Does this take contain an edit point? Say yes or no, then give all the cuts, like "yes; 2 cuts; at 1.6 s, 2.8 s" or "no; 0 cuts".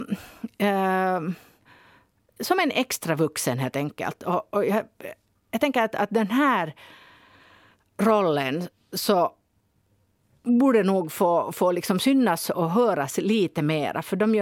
no; 0 cuts